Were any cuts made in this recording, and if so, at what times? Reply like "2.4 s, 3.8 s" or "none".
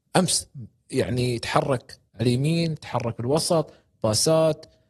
2.1 s